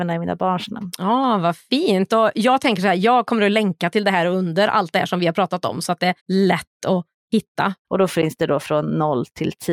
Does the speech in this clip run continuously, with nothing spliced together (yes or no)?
no